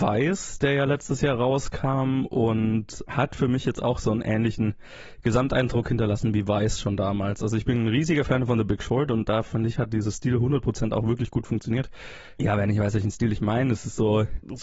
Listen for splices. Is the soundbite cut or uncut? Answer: uncut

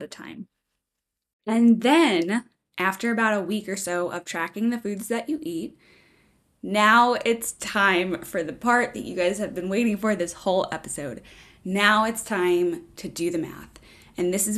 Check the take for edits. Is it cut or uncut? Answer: uncut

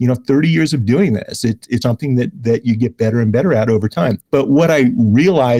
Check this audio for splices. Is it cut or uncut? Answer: cut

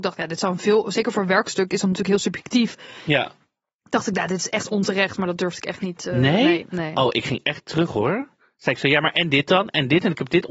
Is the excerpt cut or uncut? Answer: uncut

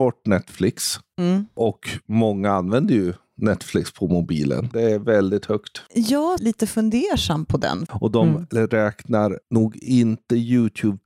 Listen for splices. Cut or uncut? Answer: cut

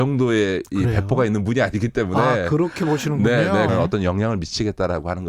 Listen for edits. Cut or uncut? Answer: cut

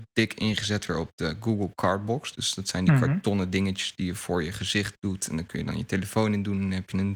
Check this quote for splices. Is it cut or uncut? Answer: uncut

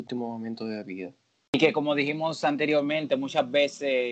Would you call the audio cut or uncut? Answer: uncut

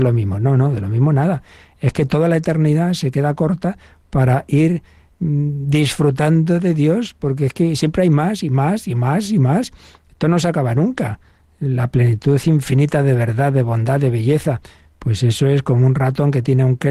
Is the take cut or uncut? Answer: uncut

